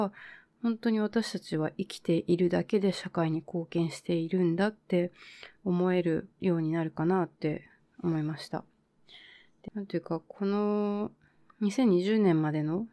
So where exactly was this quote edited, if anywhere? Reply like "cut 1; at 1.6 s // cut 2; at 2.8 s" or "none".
cut 1; at 6.3 s // cut 2; at 9.7 s